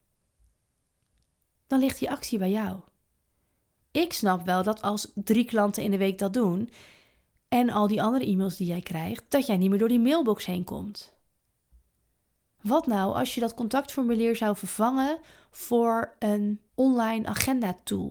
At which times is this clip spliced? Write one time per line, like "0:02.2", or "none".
0:12.6
0:16.7